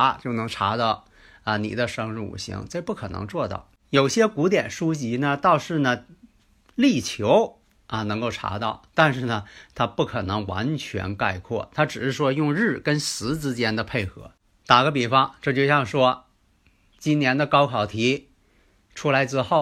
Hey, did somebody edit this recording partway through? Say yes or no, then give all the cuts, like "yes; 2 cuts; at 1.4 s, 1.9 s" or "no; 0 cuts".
no; 0 cuts